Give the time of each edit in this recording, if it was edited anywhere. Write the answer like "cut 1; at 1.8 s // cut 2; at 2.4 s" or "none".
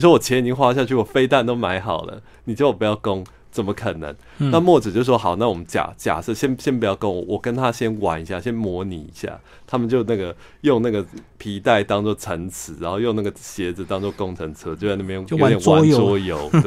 none

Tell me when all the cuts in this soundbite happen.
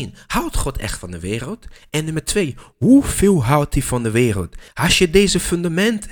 cut 1; at 4.7 s

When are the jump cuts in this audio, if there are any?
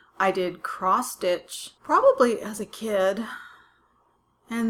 cut 1; at 1.8 s

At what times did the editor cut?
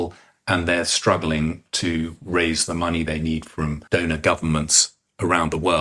cut 1; at 3.9 s

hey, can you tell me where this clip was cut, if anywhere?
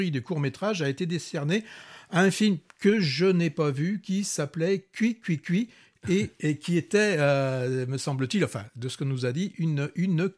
none

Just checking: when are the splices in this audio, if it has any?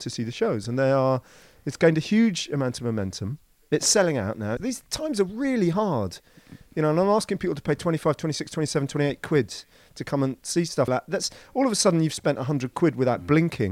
cut 1; at 4.6 s // cut 2; at 10.9 s

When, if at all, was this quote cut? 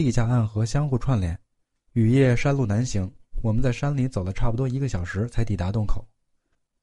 cut 1; at 1.7 s

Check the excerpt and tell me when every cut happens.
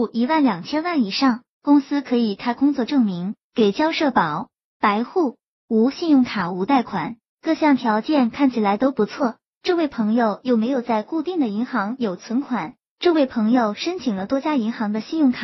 cut 1; at 9.5 s

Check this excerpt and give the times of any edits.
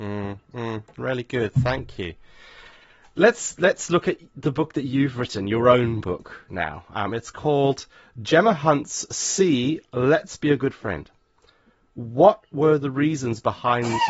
none

